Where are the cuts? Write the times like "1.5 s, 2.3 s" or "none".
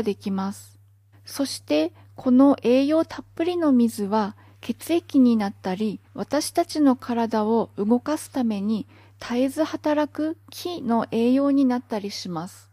1.1 s, 6.0 s